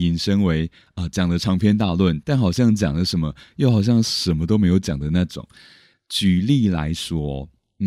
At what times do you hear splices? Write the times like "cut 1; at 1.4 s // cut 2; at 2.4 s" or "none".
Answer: cut 1; at 5.9 s